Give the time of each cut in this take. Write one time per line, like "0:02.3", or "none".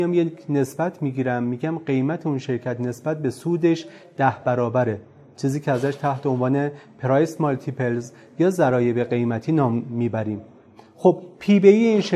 none

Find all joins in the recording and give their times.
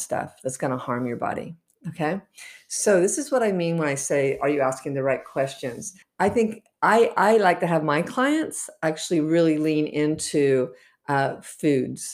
0:06.0

